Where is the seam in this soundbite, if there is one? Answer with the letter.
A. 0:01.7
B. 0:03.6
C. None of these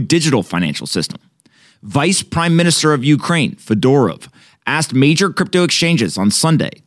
C